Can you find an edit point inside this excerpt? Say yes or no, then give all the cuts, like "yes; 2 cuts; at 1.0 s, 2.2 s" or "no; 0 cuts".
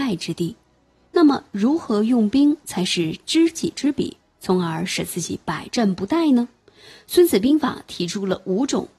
no; 0 cuts